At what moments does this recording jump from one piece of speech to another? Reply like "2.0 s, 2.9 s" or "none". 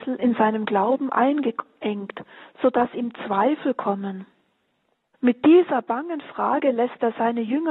5.1 s